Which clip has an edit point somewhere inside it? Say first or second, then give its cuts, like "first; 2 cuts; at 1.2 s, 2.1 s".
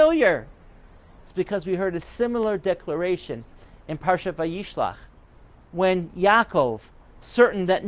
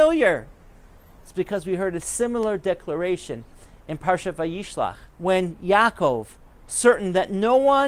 second; 1 cut; at 5.1 s